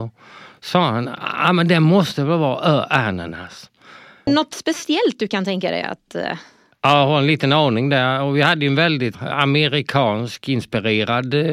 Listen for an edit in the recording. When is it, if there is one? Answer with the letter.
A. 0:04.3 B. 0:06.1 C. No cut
A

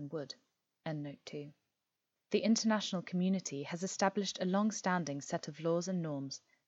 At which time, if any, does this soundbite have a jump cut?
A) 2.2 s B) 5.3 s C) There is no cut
A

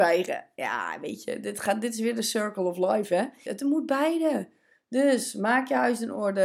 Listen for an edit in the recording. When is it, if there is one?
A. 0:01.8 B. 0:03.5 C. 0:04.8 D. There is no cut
B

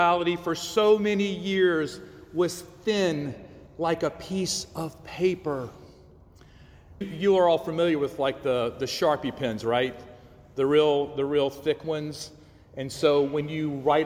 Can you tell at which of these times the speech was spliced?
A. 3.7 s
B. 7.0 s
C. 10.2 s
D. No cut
B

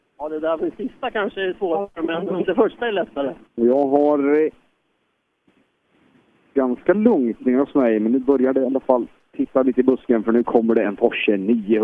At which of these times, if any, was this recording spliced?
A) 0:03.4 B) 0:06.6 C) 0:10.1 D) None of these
A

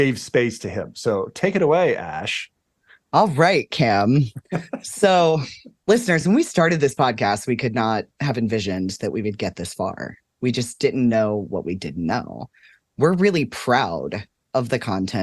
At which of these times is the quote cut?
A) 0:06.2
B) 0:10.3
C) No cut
C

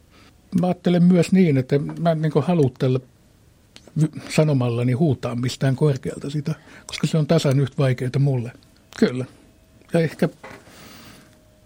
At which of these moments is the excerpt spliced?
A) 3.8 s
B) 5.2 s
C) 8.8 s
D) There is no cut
C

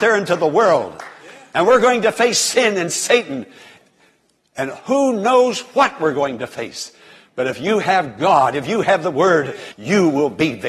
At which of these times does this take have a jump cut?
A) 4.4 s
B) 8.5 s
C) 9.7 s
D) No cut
C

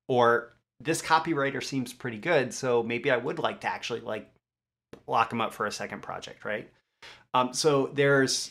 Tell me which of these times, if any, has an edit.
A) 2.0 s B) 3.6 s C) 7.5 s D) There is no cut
D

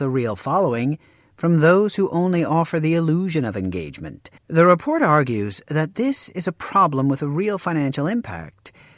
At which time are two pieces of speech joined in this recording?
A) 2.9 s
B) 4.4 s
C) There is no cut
B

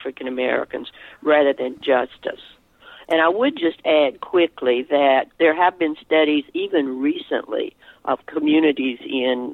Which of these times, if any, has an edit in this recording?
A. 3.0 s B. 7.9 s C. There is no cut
C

